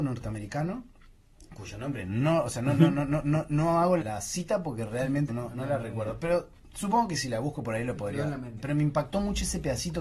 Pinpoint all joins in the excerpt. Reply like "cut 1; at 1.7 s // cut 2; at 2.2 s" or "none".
cut 1; at 4.0 s // cut 2; at 5.3 s // cut 3; at 8.6 s